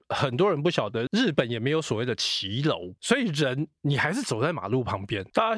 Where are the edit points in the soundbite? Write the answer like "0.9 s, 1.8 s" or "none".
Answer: 1.1 s